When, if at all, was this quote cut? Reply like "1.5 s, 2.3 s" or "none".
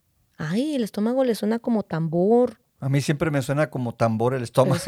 2.7 s